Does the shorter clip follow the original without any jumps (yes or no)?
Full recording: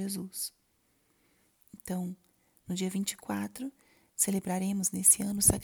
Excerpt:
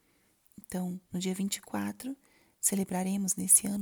no